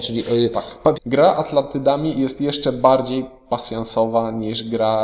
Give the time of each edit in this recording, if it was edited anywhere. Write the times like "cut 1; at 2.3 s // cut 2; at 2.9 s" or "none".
cut 1; at 0.9 s